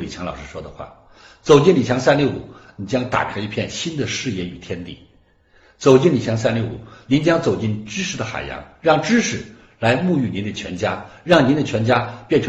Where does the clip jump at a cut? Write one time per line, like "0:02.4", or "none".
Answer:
none